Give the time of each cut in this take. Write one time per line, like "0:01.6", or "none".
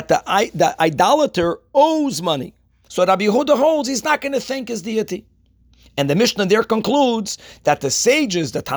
0:02.9